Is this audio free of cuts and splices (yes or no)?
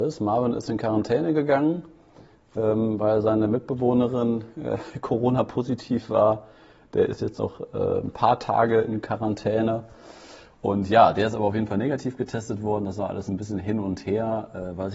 yes